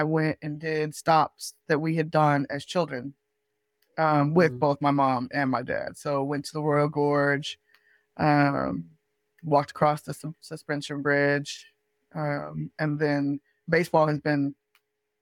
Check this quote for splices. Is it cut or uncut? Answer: uncut